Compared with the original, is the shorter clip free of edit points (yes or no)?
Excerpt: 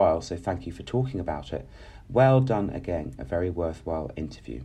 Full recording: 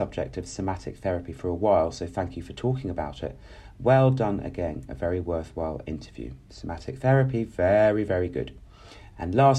yes